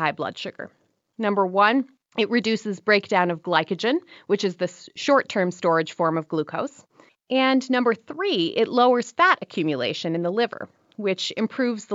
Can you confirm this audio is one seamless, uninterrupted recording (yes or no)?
no